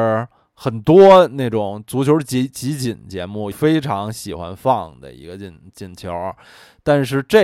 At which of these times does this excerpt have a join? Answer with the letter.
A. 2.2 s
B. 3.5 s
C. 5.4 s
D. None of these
B